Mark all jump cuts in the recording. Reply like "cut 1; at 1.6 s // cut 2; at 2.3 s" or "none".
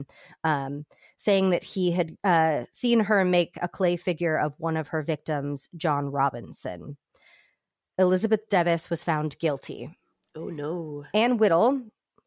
none